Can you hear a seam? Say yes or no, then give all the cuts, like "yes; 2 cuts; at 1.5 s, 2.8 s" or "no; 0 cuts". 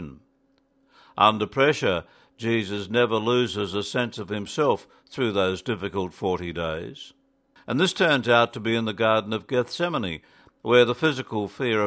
yes; 1 cut; at 7.6 s